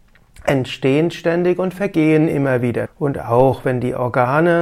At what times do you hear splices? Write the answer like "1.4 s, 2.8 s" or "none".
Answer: 2.9 s